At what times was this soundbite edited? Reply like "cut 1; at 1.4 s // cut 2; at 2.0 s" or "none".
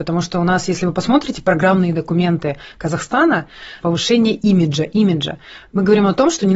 cut 1; at 3.8 s // cut 2; at 4.9 s